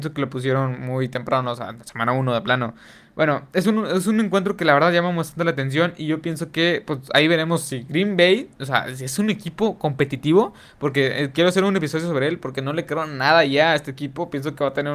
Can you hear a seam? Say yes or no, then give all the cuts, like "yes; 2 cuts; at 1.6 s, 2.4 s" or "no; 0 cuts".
no; 0 cuts